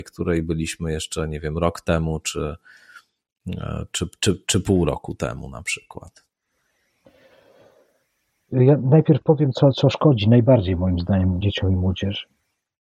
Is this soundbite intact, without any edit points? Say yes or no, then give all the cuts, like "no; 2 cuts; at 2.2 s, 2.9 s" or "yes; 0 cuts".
no; 2 cuts; at 9.5 s, 11.4 s